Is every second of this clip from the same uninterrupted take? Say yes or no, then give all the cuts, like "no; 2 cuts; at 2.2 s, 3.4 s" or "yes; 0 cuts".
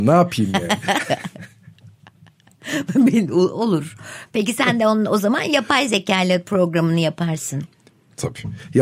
yes; 0 cuts